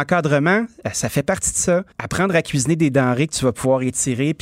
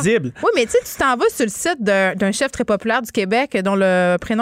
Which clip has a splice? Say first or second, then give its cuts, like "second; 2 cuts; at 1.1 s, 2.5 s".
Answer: first; 1 cut; at 1.9 s